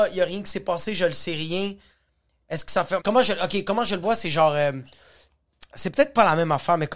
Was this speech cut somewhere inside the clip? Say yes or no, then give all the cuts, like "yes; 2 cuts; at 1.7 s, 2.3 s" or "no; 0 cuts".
yes; 1 cut; at 3.0 s